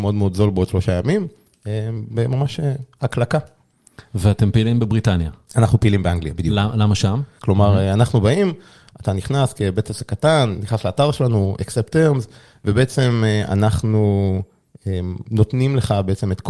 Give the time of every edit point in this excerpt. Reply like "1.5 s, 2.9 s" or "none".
7.4 s